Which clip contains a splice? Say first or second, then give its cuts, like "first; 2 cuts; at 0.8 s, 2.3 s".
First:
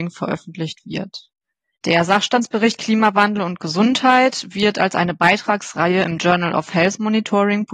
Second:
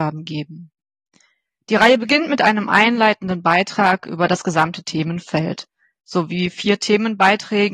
first; 1 cut; at 1.8 s